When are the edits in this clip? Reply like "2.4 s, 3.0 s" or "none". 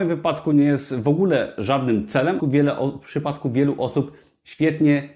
2.4 s